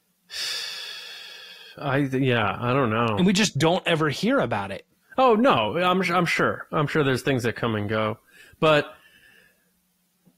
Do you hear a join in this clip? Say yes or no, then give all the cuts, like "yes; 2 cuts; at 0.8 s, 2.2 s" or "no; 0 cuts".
no; 0 cuts